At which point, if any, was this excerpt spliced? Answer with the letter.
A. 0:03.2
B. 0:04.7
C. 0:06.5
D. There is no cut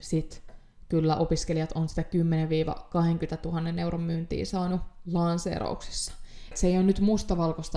C